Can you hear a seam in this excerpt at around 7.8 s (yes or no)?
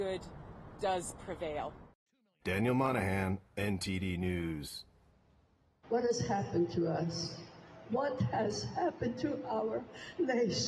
no